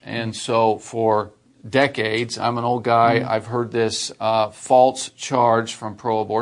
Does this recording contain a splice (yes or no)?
no